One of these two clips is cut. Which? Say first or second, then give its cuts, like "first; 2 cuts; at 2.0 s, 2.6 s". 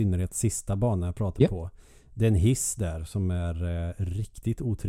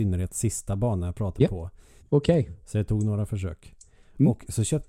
second; 1 cut; at 2.0 s